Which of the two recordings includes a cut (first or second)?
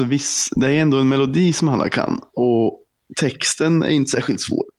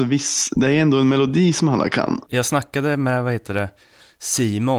second